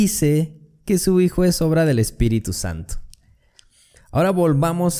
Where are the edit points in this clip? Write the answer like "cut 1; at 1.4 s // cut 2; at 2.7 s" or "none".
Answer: cut 1; at 4.0 s